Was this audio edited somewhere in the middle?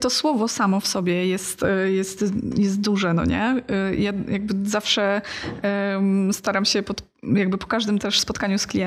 no; 0 cuts

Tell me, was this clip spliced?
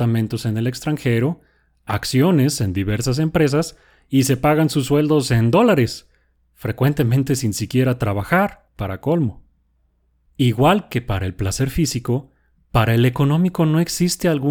no; 0 cuts

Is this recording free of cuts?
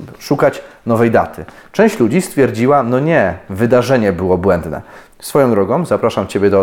no; 1 cut; at 5.1 s

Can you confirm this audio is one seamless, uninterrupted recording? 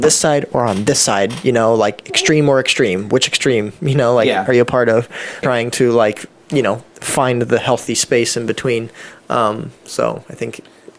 no; 1 cut; at 5.4 s

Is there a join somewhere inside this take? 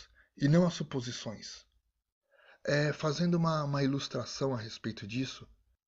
no; 0 cuts

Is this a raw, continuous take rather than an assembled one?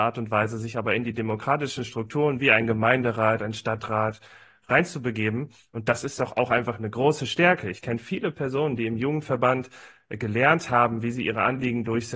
yes; 0 cuts

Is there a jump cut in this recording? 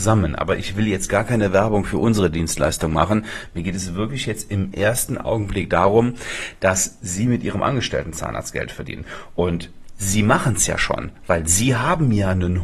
no; 0 cuts

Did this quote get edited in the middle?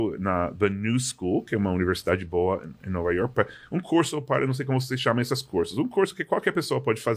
no; 0 cuts

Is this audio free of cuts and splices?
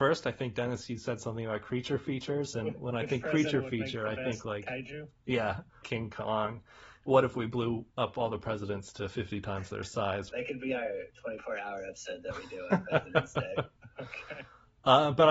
no; 2 cuts; at 5.8 s, 10.3 s

